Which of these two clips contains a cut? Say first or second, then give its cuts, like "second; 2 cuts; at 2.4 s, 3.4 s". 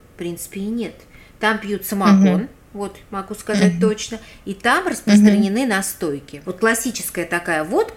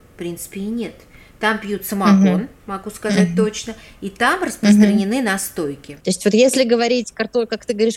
second; 2 cuts; at 2.6 s, 6.0 s